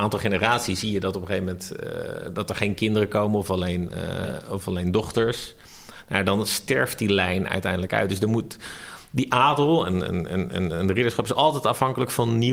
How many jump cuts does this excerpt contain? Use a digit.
0